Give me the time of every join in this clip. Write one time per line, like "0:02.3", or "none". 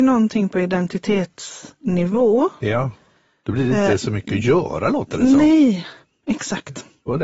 none